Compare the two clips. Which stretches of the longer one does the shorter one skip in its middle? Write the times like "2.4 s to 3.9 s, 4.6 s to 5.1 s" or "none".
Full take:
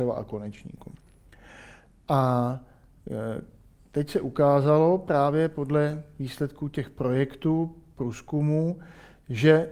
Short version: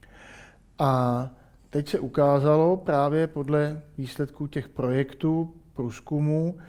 2.9 s to 3.8 s